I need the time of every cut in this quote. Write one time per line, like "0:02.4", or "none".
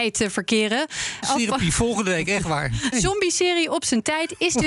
0:01.2
0:02.9